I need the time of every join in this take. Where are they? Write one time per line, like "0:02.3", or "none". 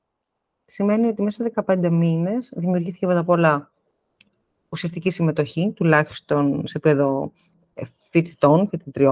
none